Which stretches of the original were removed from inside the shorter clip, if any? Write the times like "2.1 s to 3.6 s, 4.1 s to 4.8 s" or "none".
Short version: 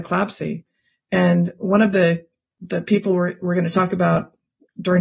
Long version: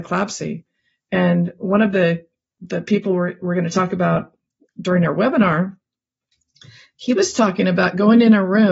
none